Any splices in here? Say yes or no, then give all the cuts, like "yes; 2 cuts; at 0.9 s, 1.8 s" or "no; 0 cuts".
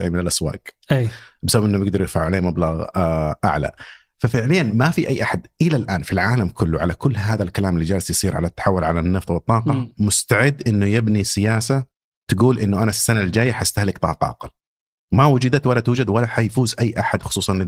no; 0 cuts